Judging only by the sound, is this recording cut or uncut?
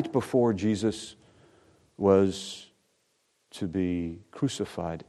uncut